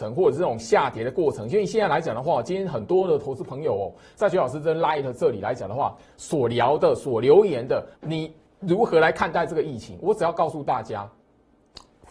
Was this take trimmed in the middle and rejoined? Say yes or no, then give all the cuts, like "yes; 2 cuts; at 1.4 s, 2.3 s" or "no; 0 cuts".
yes; 1 cut; at 7.9 s